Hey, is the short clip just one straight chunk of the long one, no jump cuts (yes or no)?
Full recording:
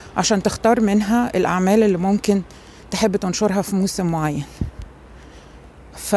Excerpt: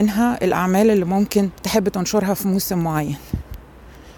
no